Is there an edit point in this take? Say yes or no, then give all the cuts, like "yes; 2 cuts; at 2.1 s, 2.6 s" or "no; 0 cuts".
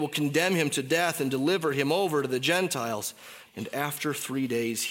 yes; 1 cut; at 3.5 s